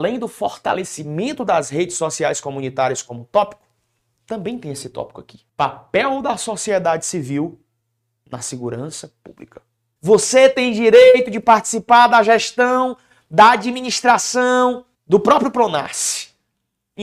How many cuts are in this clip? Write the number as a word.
three